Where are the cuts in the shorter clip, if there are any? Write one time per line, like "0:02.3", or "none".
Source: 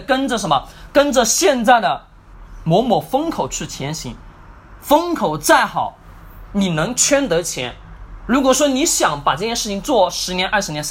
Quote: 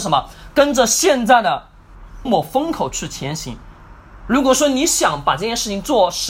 0:02.3
0:04.2